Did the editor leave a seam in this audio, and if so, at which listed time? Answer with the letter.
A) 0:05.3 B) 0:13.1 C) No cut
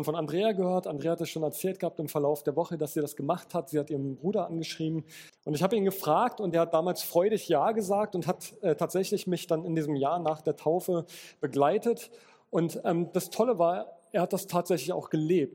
A